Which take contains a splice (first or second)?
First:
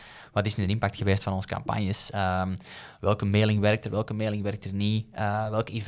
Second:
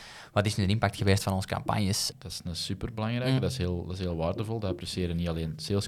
second